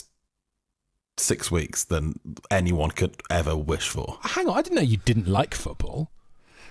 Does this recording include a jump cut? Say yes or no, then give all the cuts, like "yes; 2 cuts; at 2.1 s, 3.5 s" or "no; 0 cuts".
yes; 1 cut; at 4.2 s